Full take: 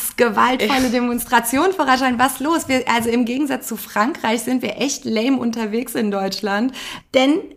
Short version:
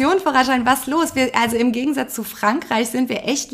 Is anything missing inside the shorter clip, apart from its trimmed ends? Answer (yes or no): no